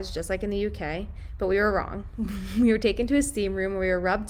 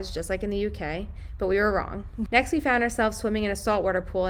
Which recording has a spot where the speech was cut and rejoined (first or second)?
second